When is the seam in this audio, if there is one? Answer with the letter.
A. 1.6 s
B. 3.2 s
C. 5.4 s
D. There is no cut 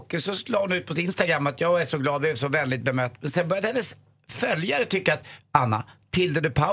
C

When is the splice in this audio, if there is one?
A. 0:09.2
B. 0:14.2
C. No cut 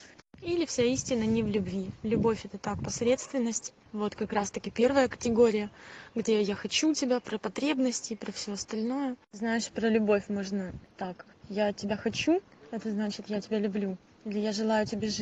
A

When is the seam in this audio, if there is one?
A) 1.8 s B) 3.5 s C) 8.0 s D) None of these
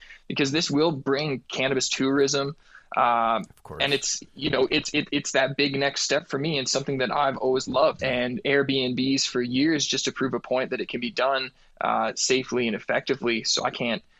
C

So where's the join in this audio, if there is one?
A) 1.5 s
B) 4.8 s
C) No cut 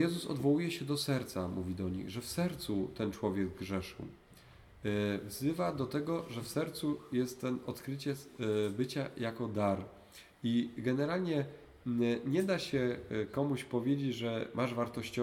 C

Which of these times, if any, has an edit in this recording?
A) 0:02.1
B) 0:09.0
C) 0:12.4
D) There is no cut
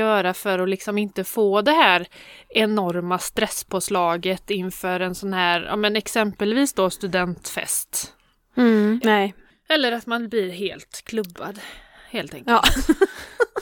B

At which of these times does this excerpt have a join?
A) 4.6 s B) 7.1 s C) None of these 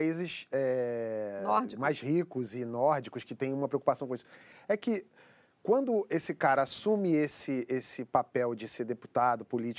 C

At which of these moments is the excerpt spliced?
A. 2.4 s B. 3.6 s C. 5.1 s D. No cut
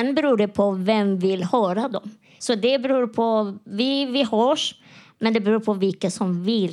A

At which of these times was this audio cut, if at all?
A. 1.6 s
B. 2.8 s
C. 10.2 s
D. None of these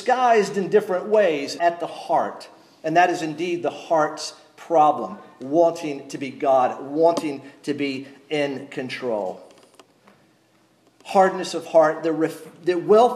A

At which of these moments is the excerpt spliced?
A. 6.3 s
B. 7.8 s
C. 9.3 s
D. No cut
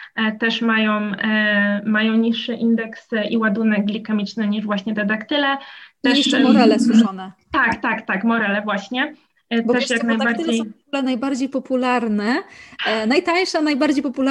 D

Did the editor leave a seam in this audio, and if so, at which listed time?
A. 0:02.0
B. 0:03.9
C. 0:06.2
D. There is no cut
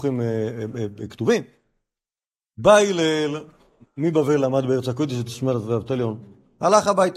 D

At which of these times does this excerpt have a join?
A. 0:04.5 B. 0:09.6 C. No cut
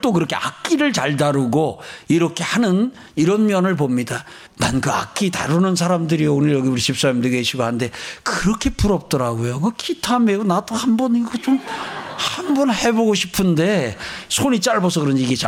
A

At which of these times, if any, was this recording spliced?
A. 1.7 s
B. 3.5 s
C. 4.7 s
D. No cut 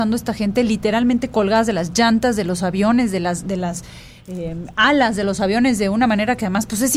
D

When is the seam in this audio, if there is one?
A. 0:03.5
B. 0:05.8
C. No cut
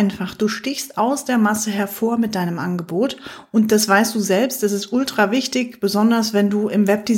C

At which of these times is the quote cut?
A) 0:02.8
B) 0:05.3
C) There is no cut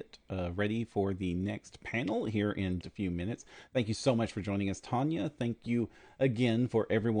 A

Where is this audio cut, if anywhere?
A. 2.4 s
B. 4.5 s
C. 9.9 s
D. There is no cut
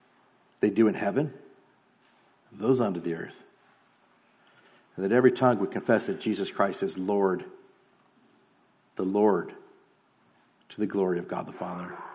A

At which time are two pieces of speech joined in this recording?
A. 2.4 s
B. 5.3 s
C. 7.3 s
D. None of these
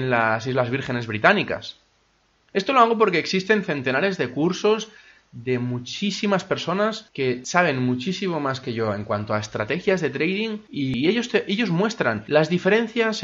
A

